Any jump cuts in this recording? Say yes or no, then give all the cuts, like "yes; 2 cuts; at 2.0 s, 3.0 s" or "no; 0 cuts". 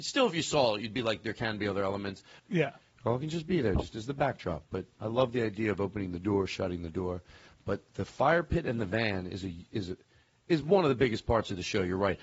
yes; 1 cut; at 2.4 s